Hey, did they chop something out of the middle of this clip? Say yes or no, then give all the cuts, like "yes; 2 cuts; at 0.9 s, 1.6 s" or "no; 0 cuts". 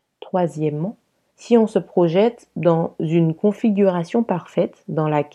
yes; 1 cut; at 1.3 s